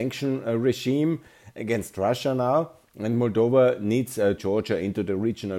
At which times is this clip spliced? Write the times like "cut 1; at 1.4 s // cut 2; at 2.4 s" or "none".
cut 1; at 4.4 s